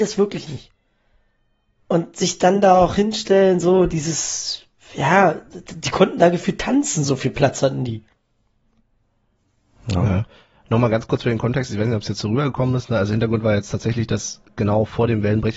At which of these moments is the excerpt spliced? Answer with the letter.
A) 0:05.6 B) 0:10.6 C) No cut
C